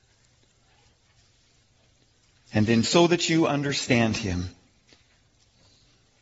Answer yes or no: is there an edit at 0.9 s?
no